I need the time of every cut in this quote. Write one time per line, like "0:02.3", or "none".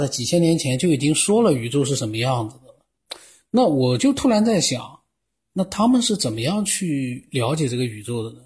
none